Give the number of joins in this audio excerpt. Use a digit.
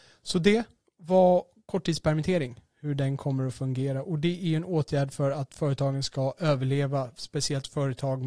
0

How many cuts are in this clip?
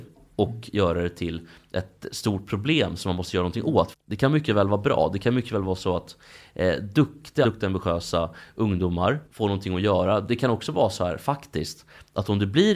3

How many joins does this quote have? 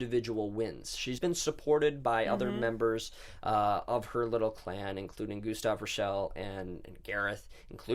1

